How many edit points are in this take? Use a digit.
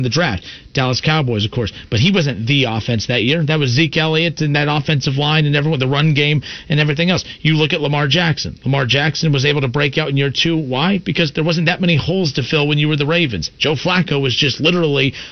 0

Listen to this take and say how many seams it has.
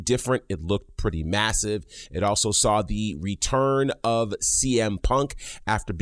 0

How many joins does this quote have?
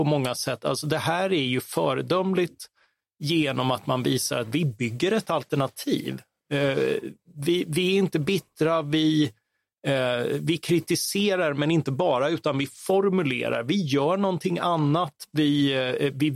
0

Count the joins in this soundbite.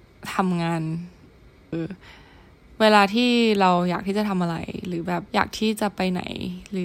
2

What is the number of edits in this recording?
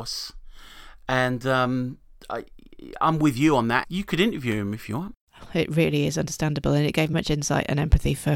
3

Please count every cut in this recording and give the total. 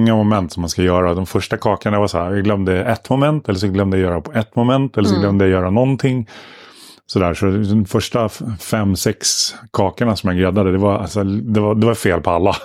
0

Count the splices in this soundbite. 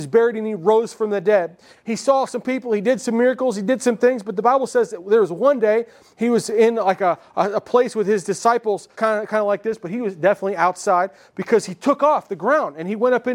2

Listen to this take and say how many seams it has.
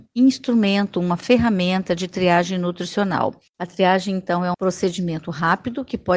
2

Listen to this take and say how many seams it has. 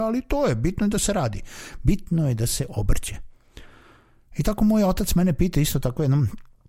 0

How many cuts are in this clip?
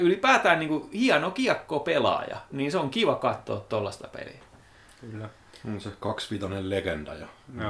0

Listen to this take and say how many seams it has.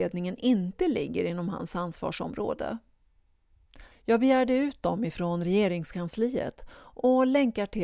1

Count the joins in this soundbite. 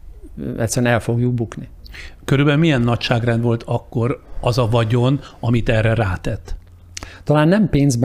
0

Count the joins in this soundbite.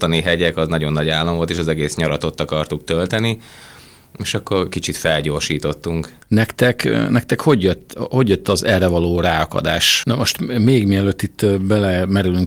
2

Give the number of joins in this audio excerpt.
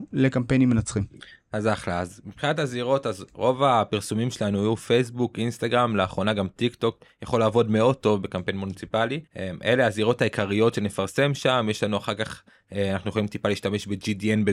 1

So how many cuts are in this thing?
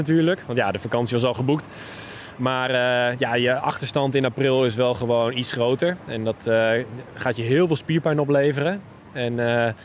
0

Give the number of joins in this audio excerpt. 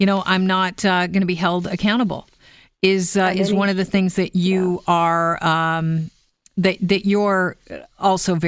0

